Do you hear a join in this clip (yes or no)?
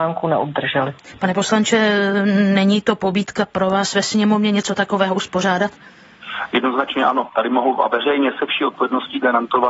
no